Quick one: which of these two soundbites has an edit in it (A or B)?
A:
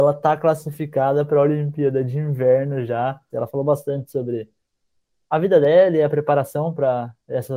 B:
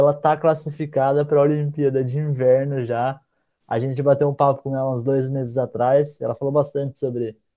A